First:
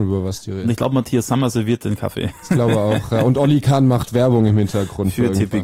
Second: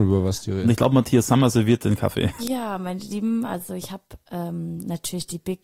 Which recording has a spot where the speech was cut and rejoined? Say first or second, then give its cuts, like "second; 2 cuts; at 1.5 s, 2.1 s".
second; 1 cut; at 2.4 s